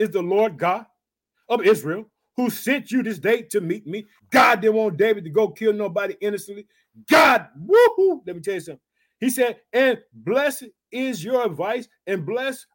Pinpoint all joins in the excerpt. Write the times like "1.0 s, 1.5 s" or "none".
4.2 s